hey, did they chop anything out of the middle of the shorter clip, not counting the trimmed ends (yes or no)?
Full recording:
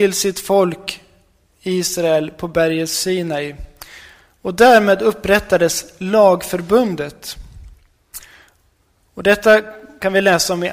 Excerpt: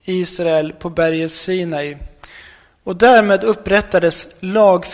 no